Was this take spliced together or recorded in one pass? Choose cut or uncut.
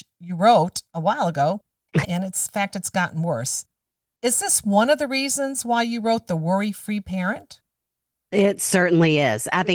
cut